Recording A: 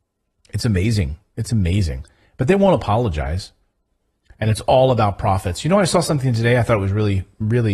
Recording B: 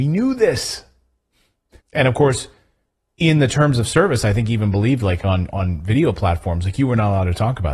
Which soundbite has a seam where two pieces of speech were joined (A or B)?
B